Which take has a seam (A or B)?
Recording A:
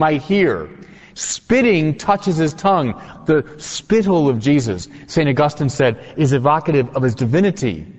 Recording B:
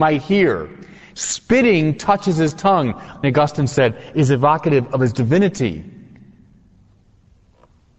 B